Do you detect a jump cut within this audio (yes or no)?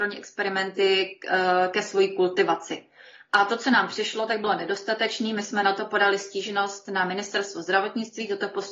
no